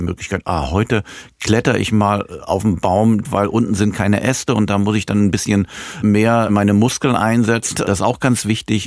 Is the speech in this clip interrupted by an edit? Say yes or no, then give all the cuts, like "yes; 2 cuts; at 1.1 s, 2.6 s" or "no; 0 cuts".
yes; 2 cuts; at 3.2 s, 7.7 s